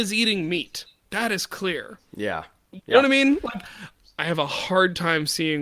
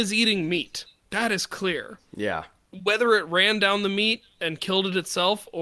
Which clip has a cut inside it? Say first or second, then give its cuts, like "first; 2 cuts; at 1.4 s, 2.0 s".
first; 1 cut; at 2.8 s